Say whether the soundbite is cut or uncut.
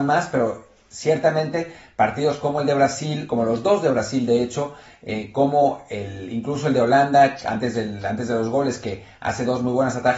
uncut